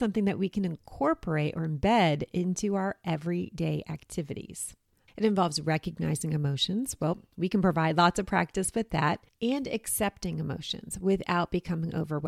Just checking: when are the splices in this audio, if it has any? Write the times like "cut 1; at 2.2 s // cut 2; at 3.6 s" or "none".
cut 1; at 5.1 s